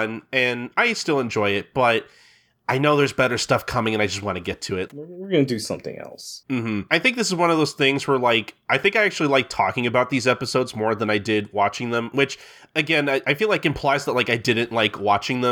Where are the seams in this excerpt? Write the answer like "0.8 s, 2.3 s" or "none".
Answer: 4.9 s